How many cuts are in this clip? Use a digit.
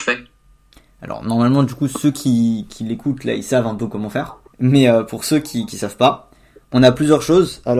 1